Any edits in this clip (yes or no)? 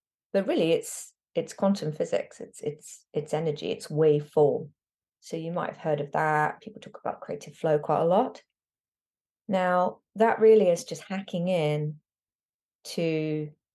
yes